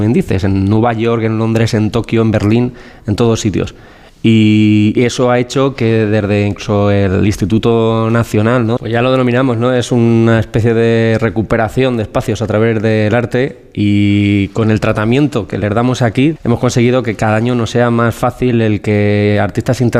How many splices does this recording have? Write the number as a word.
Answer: two